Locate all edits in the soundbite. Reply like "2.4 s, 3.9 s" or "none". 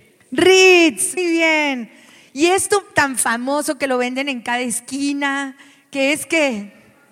1.2 s